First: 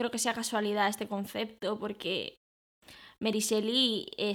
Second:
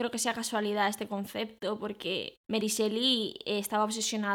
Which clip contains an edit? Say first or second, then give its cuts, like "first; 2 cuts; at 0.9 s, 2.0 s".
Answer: second; 1 cut; at 2.4 s